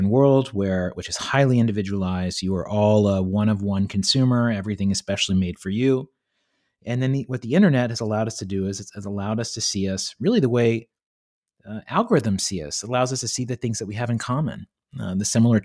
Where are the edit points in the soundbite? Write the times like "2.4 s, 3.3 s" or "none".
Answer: none